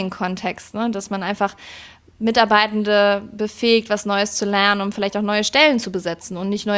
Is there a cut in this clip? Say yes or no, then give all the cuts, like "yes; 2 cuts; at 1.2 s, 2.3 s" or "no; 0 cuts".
no; 0 cuts